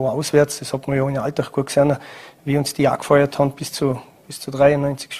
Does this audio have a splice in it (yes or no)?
no